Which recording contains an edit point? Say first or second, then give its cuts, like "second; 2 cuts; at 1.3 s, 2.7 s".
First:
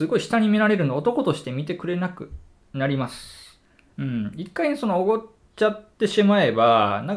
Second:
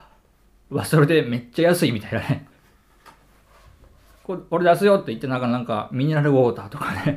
first; 1 cut; at 3.9 s